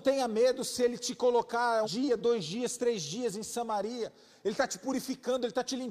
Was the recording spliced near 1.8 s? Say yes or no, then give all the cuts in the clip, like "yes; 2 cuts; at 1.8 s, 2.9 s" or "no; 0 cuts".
yes; 1 cut; at 1.8 s